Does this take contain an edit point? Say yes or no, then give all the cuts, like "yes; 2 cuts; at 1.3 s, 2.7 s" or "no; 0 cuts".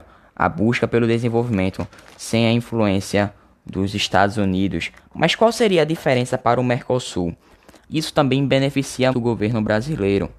yes; 2 cuts; at 7.8 s, 9.1 s